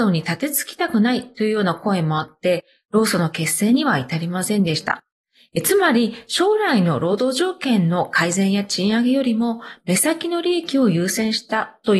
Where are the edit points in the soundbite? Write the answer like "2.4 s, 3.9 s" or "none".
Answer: none